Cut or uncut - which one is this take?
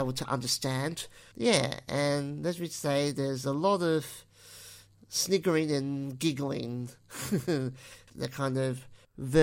cut